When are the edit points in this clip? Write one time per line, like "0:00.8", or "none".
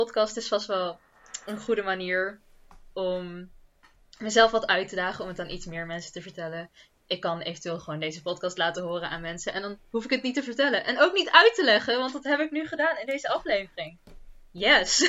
none